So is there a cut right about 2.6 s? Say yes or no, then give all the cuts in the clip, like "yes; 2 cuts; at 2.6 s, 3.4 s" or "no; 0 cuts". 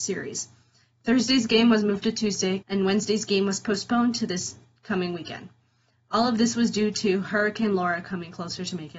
yes; 1 cut; at 2.6 s